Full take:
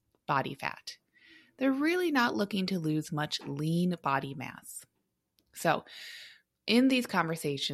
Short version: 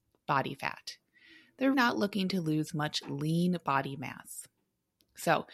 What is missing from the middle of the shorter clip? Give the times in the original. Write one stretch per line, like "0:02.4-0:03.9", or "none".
0:01.7-0:02.1